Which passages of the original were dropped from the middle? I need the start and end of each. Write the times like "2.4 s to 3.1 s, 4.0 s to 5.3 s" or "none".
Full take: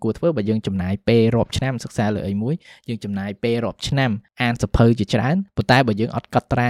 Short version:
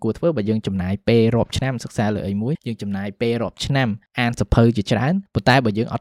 2.5 s to 2.8 s